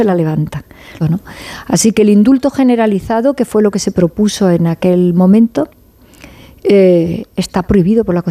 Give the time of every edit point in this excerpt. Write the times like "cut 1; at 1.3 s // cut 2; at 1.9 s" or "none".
cut 1; at 1.0 s

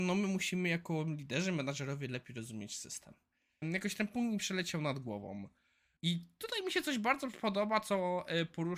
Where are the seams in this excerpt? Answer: cut 1; at 3.6 s // cut 2; at 6.0 s

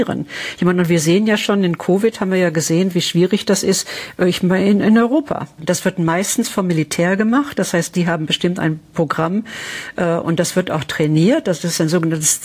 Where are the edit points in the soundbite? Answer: cut 1; at 5.6 s

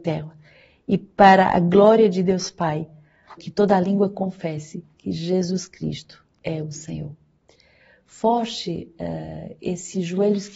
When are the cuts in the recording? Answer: cut 1; at 3.4 s

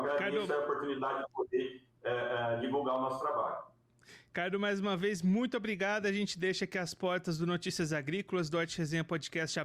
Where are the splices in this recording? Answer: none

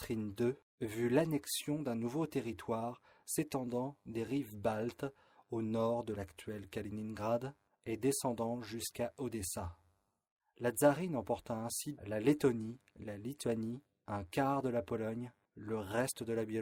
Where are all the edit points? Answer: cut 1; at 12.0 s

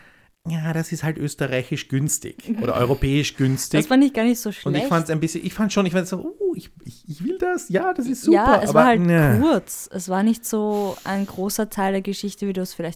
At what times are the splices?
none

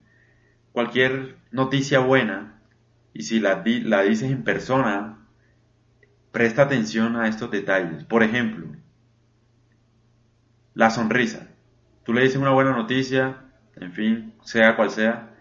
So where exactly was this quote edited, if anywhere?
none

